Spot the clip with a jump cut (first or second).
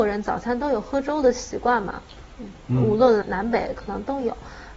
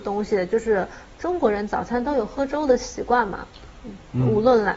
first